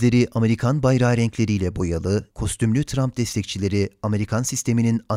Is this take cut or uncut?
cut